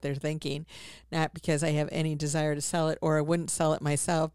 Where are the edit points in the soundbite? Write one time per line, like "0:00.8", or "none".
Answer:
none